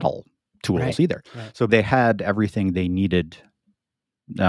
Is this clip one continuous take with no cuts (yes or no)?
no